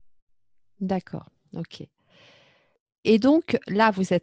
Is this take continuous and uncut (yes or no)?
yes